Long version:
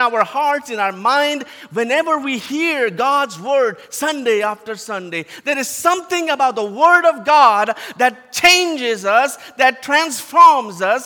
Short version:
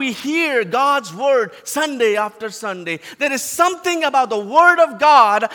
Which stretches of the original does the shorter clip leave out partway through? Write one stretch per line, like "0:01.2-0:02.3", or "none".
none